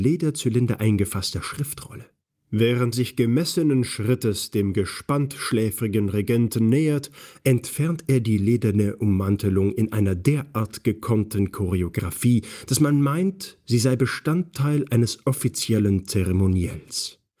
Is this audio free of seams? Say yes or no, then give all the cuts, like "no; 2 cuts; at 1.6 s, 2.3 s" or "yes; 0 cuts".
no; 1 cut; at 2.9 s